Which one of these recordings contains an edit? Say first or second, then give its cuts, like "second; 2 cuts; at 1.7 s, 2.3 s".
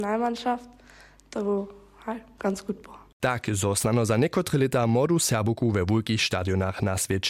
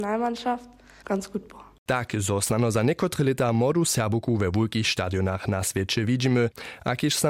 second; 1 cut; at 1.0 s